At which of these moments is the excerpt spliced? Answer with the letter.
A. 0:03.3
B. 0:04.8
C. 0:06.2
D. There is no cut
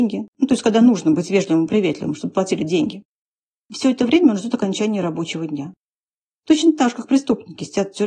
D